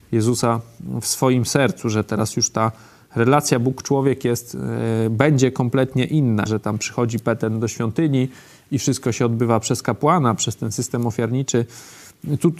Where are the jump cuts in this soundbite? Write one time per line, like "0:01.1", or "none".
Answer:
0:06.5